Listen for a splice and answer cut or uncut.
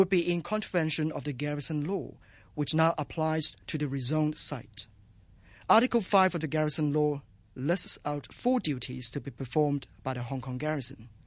uncut